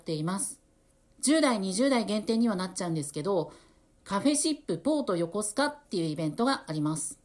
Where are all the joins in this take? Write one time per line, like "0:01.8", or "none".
0:01.0